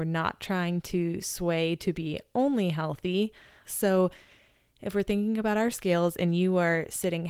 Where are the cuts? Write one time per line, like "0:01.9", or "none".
0:03.6

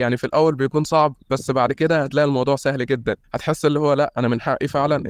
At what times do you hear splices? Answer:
0:03.2

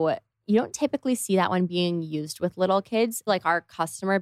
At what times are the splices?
0:03.3

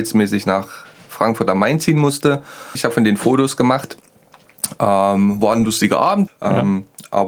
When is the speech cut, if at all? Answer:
0:02.8
0:06.3

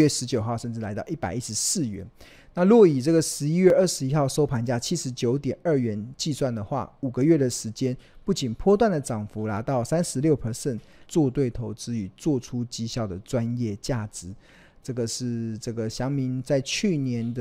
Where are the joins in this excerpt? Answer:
0:11.0

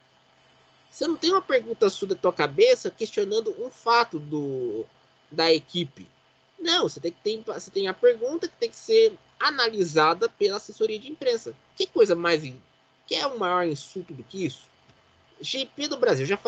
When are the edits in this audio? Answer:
0:15.2

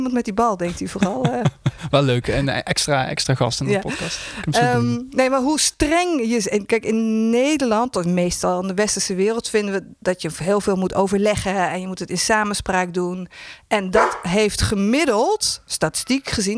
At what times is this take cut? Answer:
none

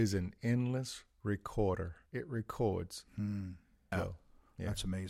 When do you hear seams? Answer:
0:02.1
0:03.9

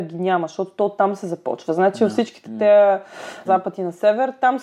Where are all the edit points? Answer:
0:03.5

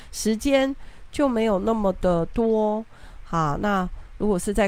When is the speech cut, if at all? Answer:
none

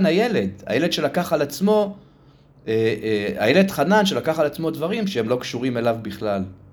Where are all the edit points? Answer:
none

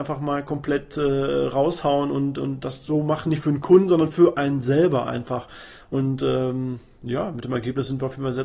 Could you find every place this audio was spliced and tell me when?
none

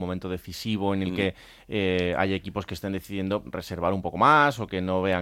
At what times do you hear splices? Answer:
0:03.4

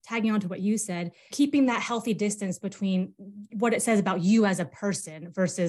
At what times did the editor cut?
0:01.3

